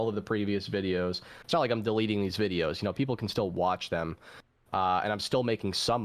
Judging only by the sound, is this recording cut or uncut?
uncut